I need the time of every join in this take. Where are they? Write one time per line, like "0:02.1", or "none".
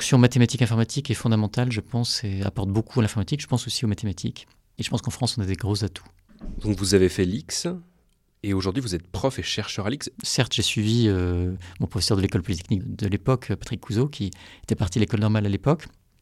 0:10.1
0:12.8